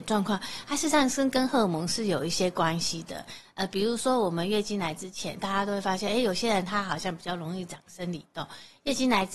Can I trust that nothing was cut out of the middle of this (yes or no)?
yes